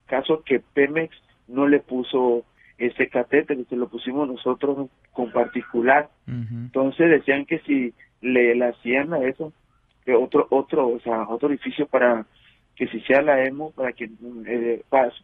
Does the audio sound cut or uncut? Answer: uncut